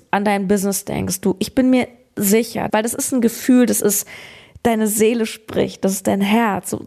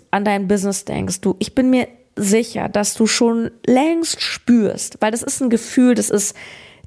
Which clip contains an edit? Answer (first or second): first